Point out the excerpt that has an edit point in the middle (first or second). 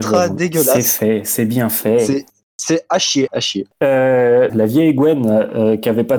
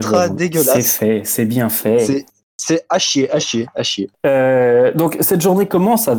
first